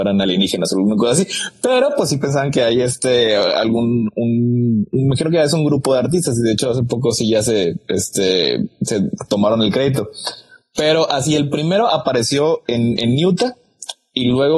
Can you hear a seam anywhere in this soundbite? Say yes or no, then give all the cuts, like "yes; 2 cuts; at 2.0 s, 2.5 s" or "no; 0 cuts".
no; 0 cuts